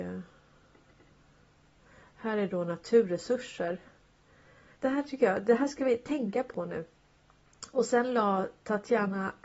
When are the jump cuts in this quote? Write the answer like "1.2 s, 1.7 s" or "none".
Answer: 4.7 s